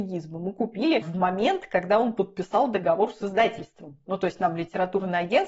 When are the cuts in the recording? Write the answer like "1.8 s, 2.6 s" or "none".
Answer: none